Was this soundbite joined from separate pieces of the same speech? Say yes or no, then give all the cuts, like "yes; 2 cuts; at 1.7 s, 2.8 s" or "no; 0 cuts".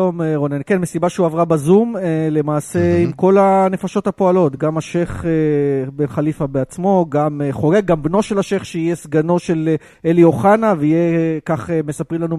no; 0 cuts